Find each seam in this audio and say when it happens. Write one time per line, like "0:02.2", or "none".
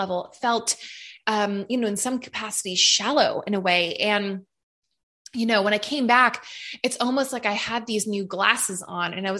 none